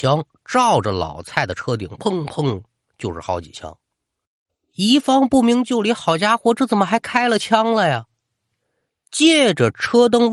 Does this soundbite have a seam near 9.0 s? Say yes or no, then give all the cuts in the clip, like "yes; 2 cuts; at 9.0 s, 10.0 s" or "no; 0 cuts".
no; 1 cut; at 2.0 s